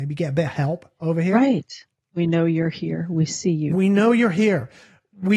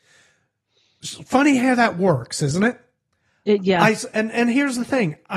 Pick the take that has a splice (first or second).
first